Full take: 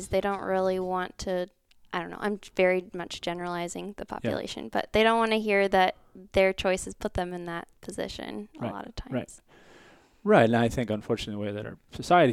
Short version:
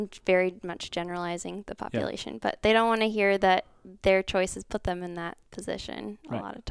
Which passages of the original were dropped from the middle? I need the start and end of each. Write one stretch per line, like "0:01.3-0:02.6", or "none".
none